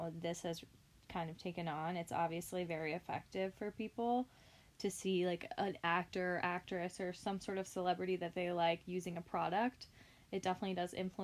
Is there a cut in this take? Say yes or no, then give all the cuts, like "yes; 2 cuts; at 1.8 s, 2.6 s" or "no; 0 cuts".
no; 0 cuts